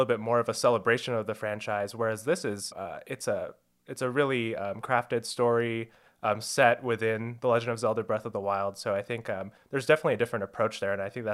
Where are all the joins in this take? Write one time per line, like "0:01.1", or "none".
0:02.7
0:04.8